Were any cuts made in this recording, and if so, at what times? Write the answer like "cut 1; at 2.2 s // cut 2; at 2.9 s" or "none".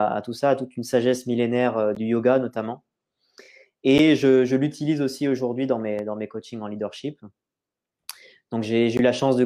none